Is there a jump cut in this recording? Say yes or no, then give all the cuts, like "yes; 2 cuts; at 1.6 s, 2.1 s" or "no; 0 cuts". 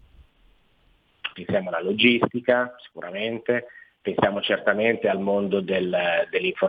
yes; 1 cut; at 1.3 s